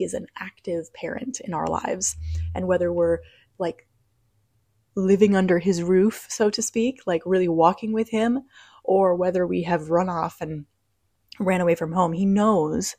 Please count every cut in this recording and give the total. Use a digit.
0